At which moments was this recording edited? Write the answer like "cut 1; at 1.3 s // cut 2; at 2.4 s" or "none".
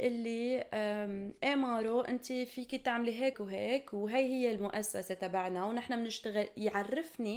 cut 1; at 3.3 s